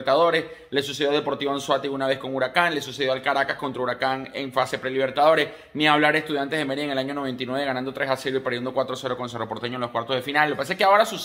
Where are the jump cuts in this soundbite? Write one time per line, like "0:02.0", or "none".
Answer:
none